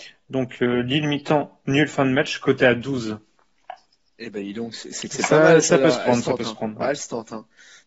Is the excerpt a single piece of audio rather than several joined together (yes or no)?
yes